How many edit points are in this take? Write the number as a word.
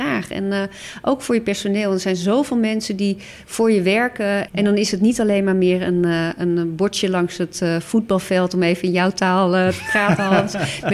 one